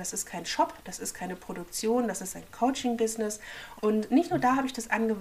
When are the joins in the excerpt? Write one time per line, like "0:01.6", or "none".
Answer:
0:03.8